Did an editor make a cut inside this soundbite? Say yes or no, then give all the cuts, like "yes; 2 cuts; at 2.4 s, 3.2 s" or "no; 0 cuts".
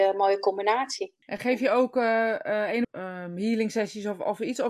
yes; 2 cuts; at 1.2 s, 2.8 s